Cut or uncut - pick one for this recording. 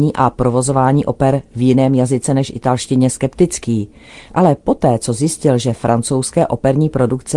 uncut